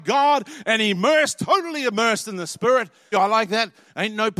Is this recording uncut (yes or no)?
no